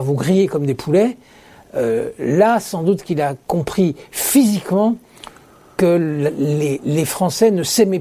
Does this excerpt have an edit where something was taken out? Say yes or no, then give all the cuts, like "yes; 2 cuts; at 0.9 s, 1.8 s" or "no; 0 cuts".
no; 0 cuts